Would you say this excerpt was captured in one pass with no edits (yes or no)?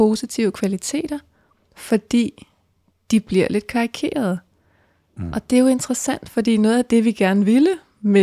yes